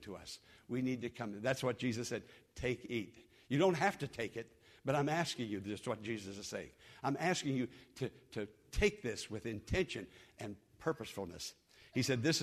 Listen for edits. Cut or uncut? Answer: uncut